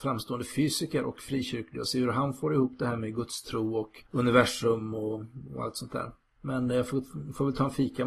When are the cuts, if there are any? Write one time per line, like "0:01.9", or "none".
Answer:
0:04.1

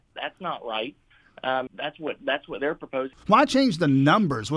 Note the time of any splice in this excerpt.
0:01.7
0:03.1

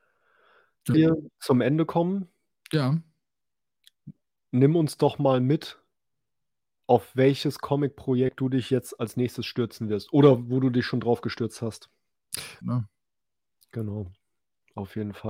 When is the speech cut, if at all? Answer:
0:00.9
0:12.6

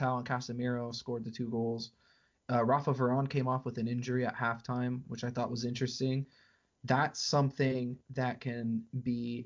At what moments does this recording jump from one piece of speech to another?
0:08.0

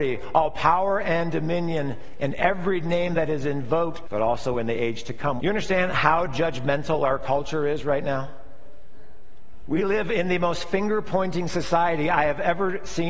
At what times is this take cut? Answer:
0:04.0
0:05.4

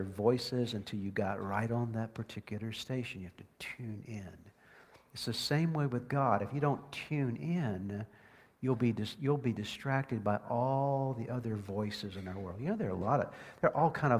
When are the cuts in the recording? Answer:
none

